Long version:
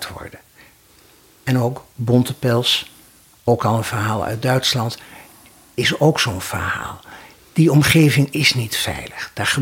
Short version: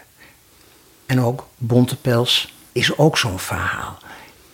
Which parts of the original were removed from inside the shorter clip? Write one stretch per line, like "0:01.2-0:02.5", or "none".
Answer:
0:03.1-0:05.7

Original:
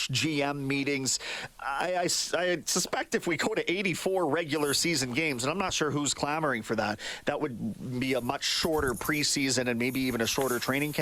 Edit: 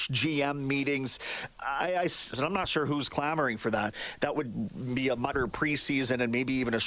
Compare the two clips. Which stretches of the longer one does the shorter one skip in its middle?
0:02.3-0:05.4
0:08.4-0:08.8

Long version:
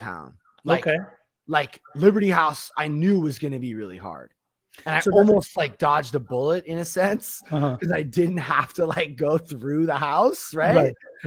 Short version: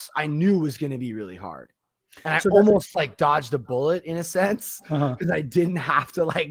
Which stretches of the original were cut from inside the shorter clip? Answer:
none

